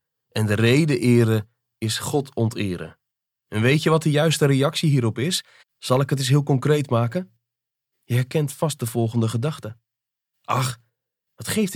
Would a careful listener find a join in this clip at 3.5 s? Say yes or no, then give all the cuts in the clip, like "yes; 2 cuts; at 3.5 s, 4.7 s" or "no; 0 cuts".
yes; 2 cuts; at 3.5 s, 5.6 s